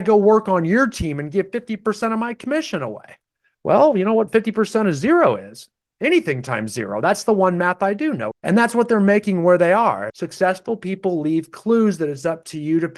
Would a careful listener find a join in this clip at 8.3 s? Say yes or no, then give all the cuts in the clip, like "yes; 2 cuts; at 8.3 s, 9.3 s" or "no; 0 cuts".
yes; 2 cuts; at 8.3 s, 10.1 s